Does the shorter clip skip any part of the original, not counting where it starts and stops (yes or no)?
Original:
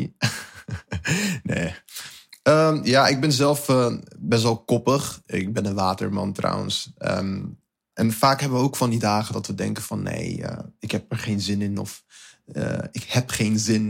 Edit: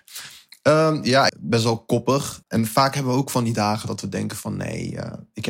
yes